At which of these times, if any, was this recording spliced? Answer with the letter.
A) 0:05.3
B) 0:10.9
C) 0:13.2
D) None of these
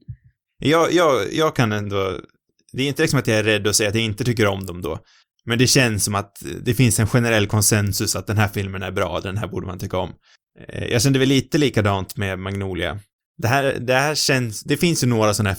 C